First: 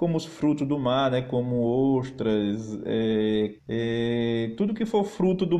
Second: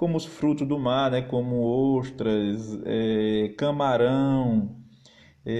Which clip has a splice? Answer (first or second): first